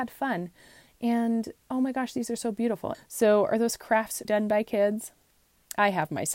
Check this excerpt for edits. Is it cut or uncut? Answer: cut